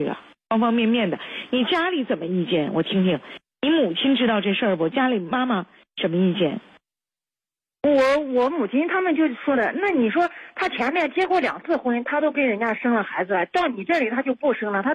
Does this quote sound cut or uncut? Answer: uncut